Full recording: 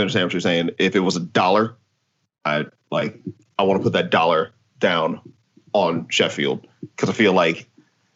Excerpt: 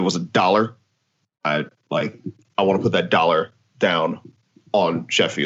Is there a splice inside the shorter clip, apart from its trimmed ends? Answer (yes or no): no